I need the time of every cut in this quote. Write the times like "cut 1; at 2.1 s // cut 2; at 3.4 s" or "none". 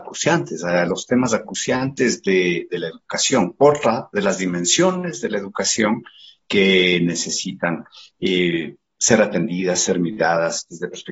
none